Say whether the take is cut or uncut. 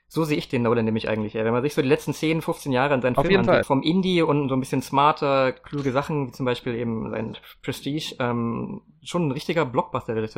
cut